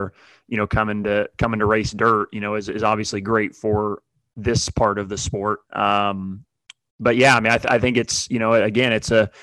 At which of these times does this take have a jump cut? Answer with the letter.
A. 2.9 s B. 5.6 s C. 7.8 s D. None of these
B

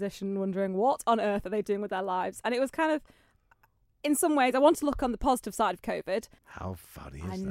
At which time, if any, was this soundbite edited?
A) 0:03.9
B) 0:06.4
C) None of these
B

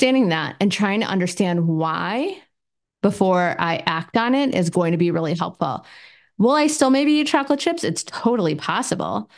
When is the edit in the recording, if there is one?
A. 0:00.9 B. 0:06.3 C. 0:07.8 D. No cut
D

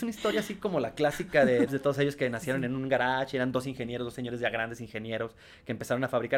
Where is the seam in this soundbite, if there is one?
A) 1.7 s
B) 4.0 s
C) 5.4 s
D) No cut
A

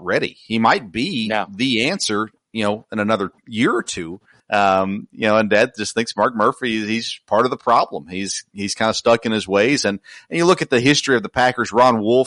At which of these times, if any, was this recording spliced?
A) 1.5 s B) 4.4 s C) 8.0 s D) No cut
B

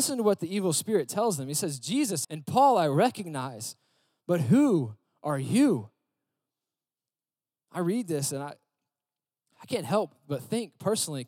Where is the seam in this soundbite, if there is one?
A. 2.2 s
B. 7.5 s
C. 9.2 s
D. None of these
A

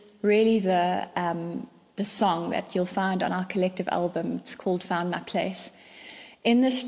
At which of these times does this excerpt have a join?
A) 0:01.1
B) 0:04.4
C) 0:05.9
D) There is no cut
D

